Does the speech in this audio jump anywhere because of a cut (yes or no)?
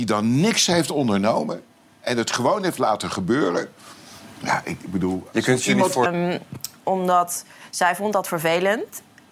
yes